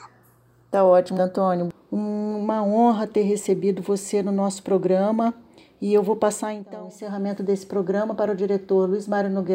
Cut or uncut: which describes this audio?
cut